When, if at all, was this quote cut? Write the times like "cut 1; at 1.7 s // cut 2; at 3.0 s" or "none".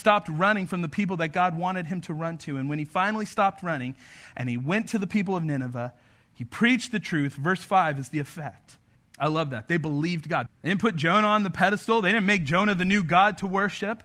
cut 1; at 9.0 s // cut 2; at 10.5 s